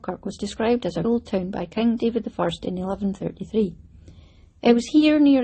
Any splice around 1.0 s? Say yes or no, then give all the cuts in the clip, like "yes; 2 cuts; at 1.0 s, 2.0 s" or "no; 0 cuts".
yes; 1 cut; at 1.0 s